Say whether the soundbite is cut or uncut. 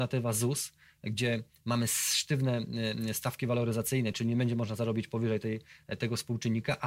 uncut